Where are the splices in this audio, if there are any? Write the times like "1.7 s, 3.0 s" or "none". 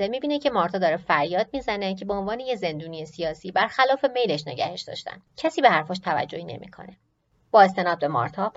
5.3 s

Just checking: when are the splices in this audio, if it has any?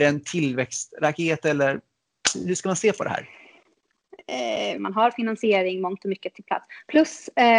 4.8 s

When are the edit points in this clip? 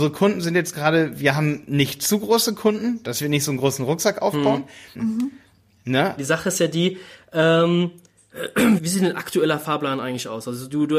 4.9 s, 6.2 s, 8.8 s

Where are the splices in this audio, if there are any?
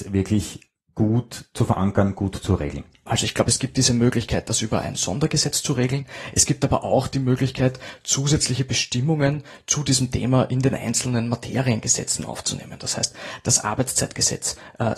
none

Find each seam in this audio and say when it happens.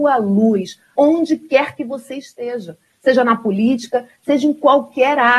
1.0 s

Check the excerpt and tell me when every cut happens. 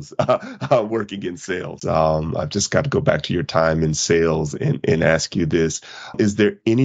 1.8 s

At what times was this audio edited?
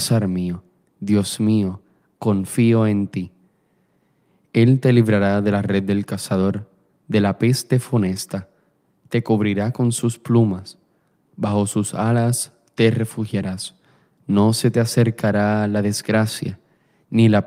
14.2 s

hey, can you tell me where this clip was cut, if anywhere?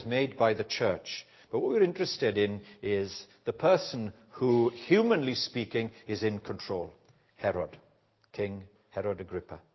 8.8 s

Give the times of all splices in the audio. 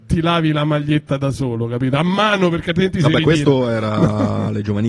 none

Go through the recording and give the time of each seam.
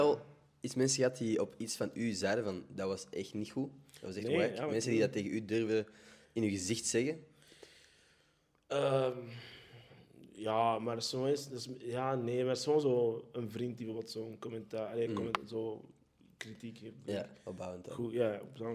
none

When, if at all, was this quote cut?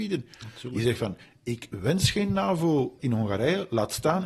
3.0 s

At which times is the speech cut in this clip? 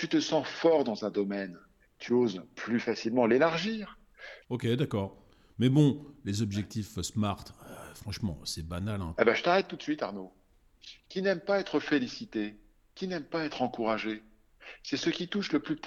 4.4 s, 9.2 s

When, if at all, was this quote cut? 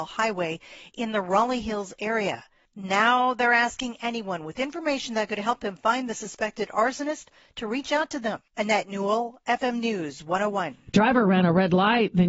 none

